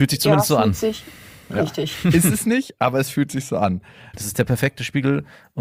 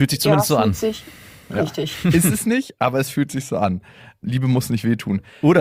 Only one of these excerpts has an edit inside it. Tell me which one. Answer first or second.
first